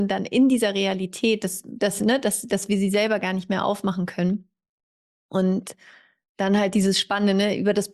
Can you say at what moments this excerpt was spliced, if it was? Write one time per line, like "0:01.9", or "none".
none